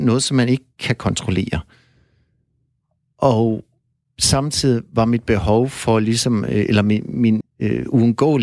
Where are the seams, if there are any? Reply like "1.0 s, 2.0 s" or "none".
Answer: 7.4 s